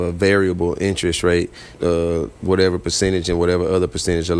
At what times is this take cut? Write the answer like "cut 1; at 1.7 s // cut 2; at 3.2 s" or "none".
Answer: cut 1; at 1.7 s